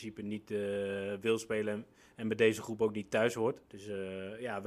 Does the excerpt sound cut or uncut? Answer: cut